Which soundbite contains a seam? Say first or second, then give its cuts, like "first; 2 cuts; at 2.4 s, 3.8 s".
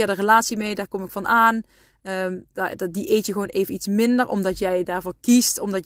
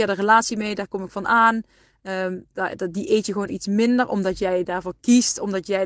second; 1 cut; at 3.5 s